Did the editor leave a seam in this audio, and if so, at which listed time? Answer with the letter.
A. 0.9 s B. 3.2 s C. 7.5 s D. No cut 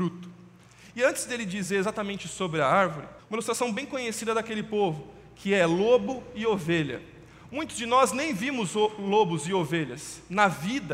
B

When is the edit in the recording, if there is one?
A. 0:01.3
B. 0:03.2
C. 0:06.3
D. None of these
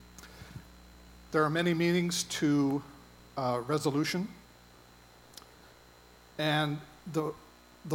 A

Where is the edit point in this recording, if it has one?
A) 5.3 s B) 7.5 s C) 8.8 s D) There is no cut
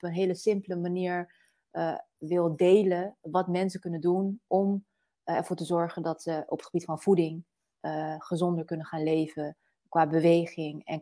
D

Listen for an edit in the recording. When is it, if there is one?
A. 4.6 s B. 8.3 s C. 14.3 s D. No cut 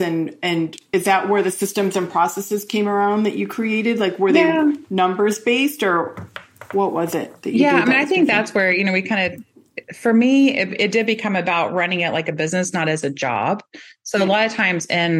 D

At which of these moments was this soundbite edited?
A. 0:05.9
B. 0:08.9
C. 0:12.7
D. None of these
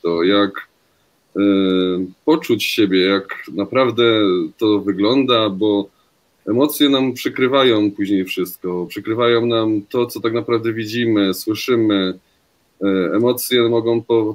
D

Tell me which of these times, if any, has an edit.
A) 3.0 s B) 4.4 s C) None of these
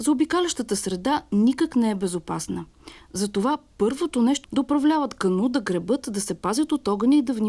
B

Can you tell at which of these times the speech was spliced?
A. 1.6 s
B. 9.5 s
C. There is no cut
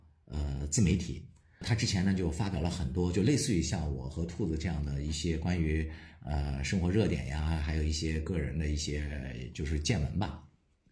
A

